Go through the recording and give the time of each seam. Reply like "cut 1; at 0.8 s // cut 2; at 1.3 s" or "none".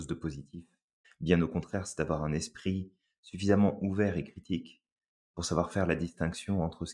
cut 1; at 1.0 s